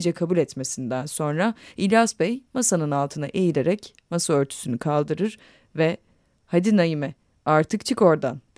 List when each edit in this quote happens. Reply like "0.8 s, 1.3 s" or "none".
none